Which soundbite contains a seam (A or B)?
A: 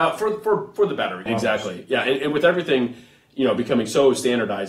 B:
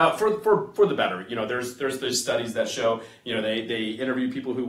A